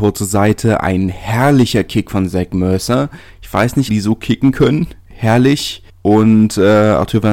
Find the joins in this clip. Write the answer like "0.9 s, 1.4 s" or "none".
3.9 s